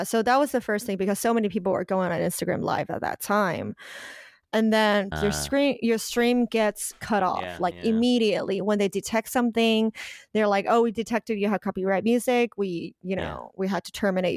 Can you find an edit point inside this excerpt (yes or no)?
yes